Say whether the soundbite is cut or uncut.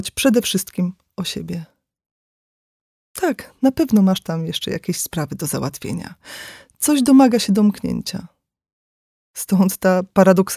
uncut